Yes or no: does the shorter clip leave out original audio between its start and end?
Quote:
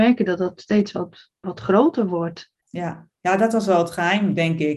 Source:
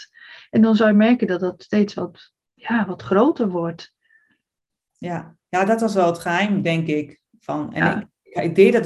yes